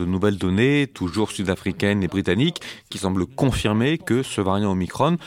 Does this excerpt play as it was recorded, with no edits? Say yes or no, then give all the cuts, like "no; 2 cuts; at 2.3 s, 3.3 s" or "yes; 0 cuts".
yes; 0 cuts